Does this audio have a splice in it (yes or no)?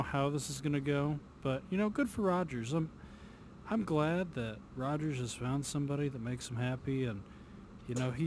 no